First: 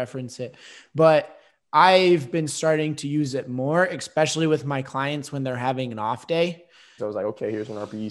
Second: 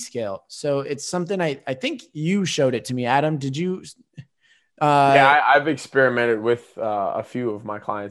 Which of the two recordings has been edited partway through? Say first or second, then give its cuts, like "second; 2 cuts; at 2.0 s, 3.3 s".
first; 1 cut; at 7.0 s